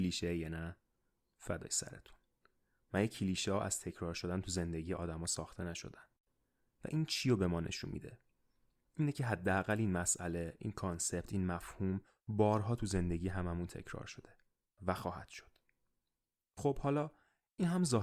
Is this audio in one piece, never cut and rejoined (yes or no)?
yes